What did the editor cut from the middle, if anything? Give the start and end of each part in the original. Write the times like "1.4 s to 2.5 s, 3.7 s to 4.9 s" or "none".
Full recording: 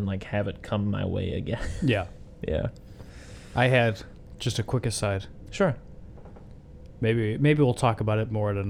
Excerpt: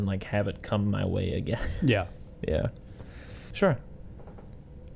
3.5 s to 5.5 s